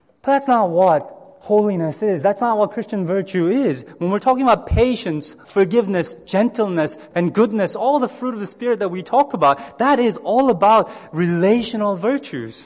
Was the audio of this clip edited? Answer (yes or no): yes